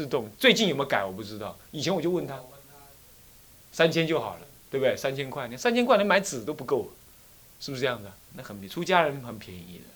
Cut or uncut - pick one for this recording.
cut